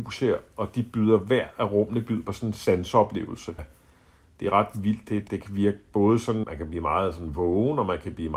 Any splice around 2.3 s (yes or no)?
no